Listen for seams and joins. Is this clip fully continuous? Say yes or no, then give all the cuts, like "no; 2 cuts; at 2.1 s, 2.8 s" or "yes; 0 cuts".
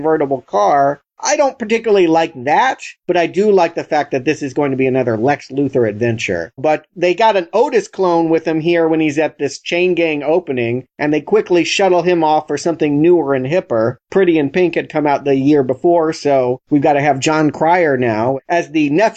no; 1 cut; at 6.6 s